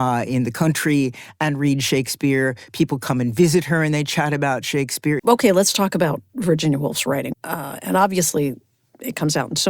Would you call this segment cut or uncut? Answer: cut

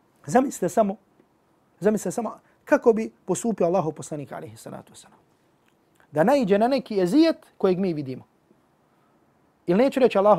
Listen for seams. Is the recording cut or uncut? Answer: uncut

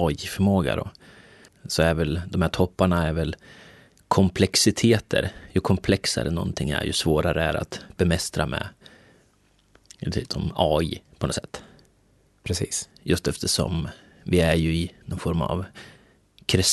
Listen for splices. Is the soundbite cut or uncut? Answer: cut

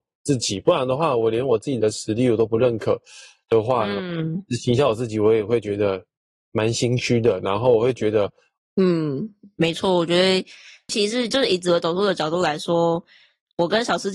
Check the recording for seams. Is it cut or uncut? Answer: cut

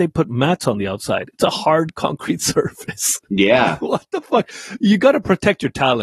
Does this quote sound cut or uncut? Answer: uncut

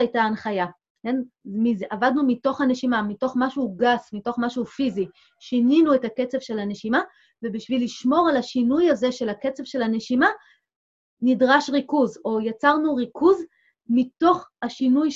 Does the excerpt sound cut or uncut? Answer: uncut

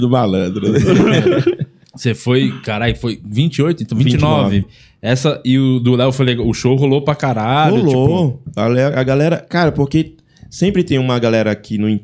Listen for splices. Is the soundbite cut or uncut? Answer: cut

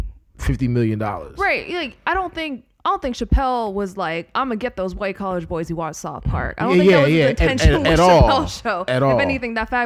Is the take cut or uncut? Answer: uncut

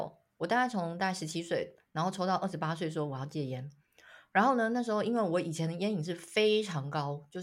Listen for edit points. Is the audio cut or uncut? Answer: uncut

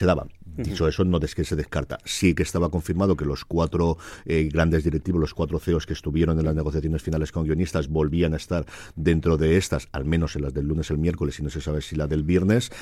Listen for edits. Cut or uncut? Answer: uncut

